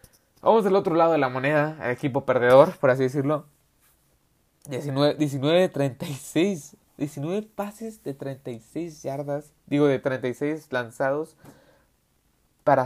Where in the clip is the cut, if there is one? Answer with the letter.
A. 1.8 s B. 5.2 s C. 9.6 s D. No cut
D